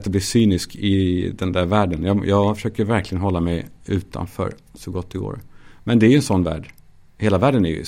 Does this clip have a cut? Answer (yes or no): no